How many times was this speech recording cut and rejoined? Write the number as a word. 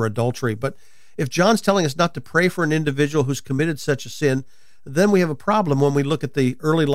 zero